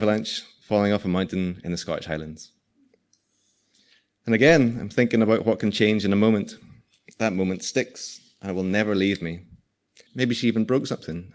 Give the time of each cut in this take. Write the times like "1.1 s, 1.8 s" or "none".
10.1 s